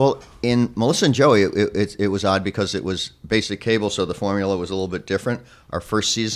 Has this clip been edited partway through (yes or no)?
no